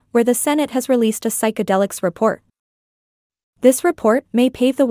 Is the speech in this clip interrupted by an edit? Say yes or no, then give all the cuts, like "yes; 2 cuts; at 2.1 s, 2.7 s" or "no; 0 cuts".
yes; 1 cut; at 3.4 s